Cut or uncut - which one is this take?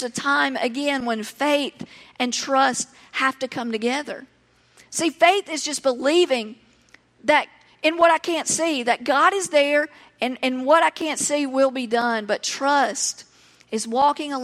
uncut